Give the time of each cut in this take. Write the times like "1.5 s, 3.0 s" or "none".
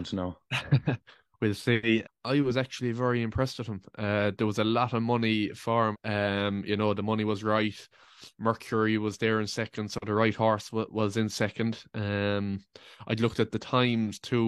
2.0 s, 5.9 s